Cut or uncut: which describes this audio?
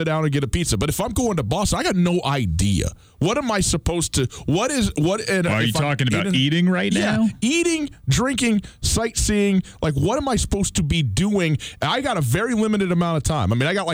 uncut